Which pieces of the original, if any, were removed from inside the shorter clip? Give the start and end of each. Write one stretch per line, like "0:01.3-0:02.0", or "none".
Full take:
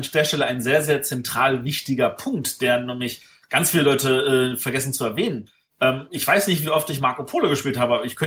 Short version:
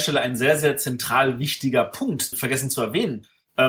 0:02.6-0:04.6